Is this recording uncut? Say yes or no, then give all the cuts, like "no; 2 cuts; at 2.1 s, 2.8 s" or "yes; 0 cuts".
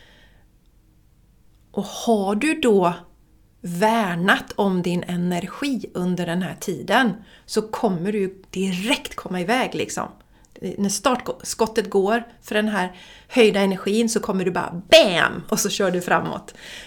yes; 0 cuts